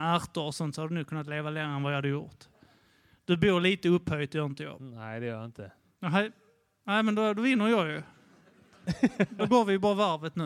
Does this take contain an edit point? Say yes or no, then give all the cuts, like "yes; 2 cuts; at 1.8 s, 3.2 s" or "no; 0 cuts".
no; 0 cuts